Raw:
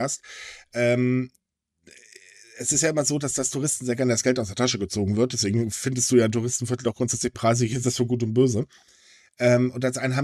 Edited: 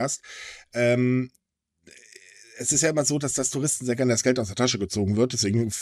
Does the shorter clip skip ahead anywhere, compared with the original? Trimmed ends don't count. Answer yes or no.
no